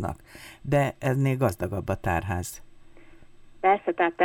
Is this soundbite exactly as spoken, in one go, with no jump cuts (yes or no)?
yes